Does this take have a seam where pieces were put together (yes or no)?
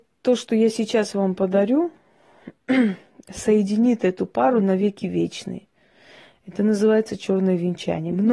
no